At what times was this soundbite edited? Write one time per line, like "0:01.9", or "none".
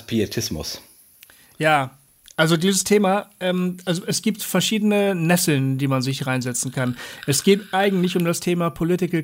none